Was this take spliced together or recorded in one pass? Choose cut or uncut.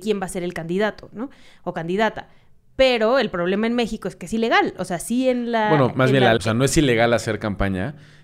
cut